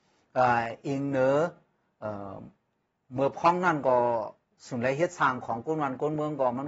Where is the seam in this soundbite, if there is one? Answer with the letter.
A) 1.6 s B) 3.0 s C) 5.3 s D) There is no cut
D